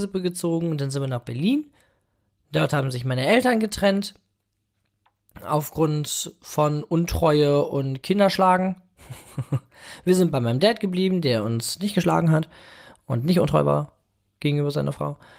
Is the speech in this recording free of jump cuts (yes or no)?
yes